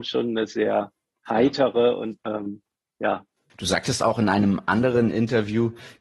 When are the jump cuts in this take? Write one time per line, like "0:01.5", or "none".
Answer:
0:02.2